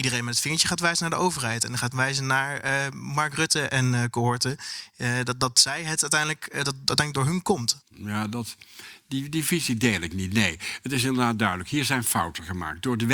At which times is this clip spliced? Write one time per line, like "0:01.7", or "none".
0:07.8